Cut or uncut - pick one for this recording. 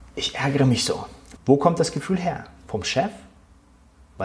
cut